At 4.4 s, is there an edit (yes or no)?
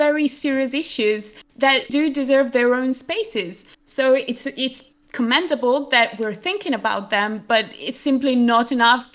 no